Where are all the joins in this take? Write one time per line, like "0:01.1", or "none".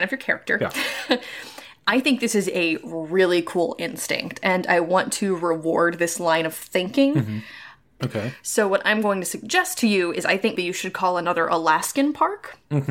0:08.0
0:10.5